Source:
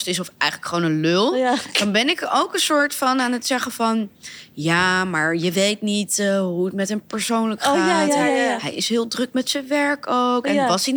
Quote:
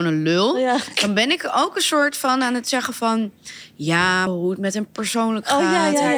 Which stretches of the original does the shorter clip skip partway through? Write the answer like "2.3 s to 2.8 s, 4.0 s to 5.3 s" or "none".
5.0 s to 6.4 s